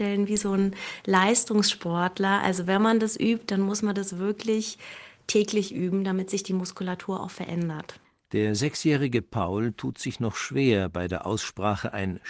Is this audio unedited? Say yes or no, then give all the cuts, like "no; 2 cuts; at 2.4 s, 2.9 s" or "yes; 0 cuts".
no; 1 cut; at 8.2 s